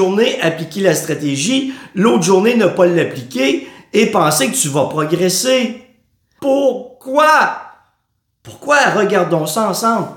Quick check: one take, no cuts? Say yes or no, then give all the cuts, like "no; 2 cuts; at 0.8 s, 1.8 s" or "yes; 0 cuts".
no; 1 cut; at 6.4 s